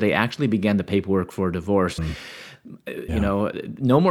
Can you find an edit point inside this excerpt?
yes; 2 cuts; at 2.0 s, 3.1 s

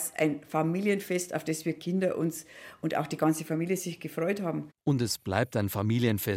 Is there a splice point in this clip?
no; 0 cuts

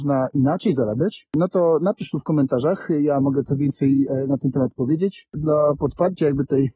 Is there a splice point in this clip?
no; 0 cuts

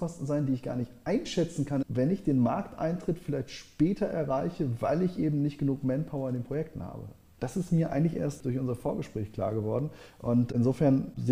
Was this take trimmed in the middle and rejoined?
yes; 1 cut; at 1.8 s

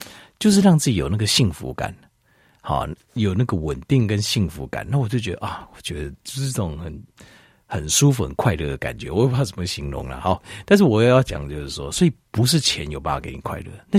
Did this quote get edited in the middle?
no; 0 cuts

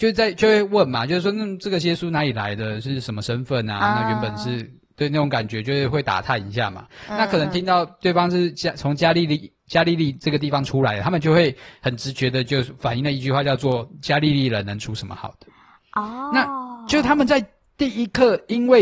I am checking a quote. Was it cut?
no; 0 cuts

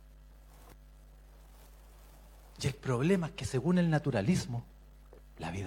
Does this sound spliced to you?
no; 0 cuts

